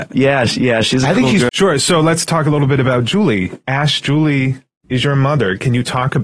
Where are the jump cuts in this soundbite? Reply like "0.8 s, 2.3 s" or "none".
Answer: 1.5 s